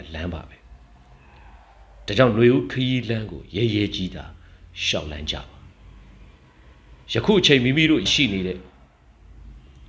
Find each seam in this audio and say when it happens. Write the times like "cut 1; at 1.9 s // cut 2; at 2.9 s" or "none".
cut 1; at 8.1 s

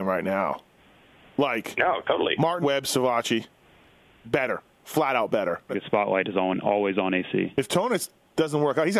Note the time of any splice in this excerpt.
cut 1; at 2.6 s // cut 2; at 5.7 s

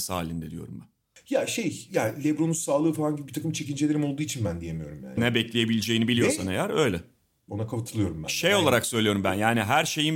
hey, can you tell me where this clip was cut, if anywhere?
cut 1; at 5.2 s // cut 2; at 7.5 s

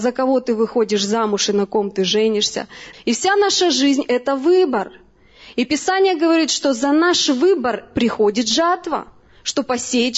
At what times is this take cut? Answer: cut 1; at 2.9 s

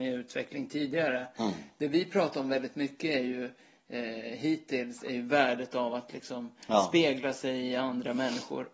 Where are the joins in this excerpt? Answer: none

